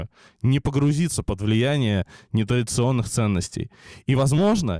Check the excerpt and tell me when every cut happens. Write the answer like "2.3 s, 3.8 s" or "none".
none